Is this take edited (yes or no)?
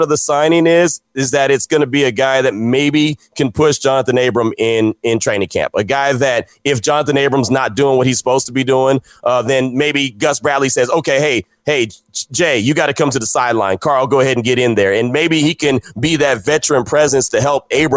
no